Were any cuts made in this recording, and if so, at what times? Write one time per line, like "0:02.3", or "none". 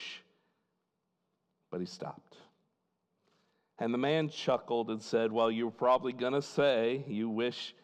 none

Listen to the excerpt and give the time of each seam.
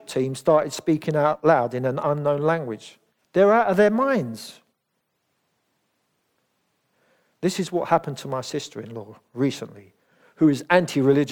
0:03.2

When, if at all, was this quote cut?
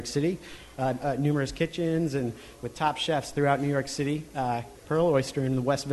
0:01.0
0:04.7

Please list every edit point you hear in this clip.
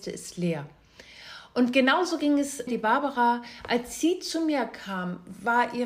0:02.7

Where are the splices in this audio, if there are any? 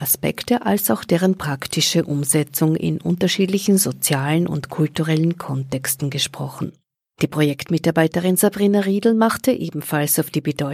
none

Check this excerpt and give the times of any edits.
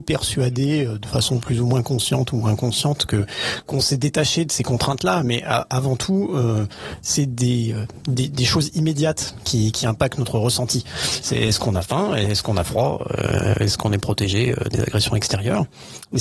none

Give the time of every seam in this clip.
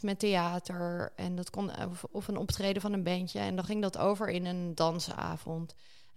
none

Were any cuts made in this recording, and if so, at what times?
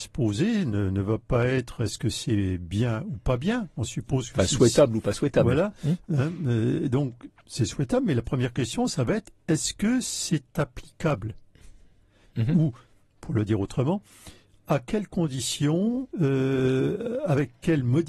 0:16.1

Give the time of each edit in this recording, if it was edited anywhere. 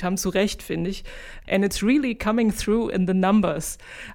0:01.5

